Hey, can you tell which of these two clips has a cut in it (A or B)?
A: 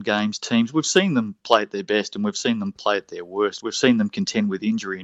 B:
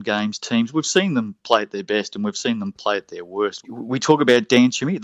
B